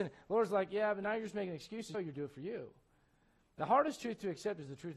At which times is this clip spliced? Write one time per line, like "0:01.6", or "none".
0:01.9